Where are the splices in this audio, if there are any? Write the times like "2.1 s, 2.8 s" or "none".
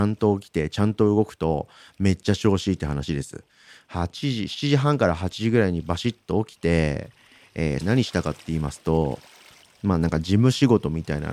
7.8 s